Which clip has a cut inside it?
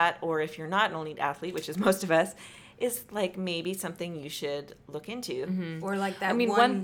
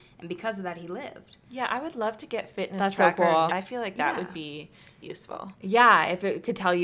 second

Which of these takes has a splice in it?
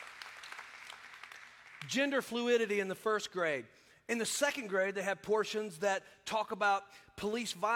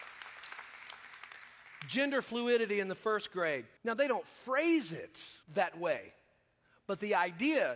second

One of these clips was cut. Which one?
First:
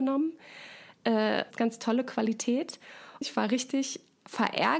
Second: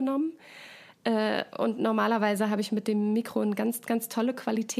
first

